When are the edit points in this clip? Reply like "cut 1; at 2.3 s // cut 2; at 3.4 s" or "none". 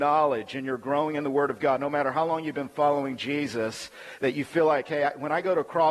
none